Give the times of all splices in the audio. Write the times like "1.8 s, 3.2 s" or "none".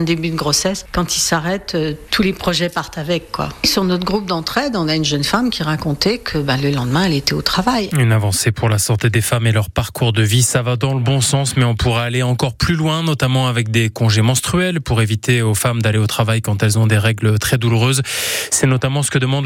7.9 s